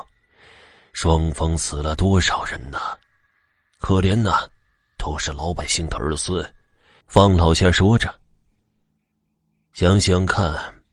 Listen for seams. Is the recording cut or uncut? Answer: cut